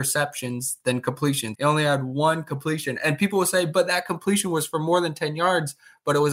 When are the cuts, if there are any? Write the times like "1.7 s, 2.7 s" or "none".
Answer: 1.5 s